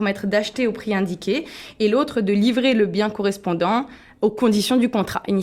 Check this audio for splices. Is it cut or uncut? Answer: uncut